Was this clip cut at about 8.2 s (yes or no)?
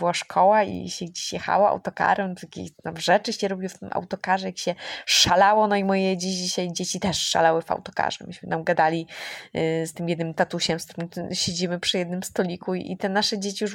no